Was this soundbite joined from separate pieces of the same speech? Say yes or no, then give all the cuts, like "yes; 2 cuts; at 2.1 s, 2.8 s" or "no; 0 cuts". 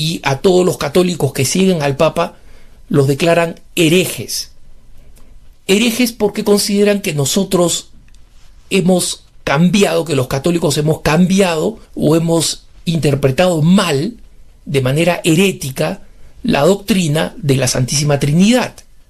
yes; 2 cuts; at 5.5 s, 11.8 s